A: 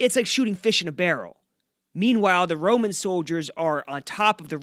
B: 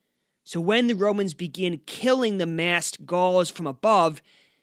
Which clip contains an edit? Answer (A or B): A